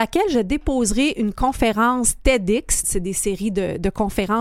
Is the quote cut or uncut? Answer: cut